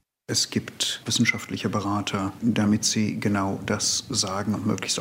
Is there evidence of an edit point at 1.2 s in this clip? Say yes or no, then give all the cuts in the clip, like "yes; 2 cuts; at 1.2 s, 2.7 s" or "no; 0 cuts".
no; 1 cut; at 2.4 s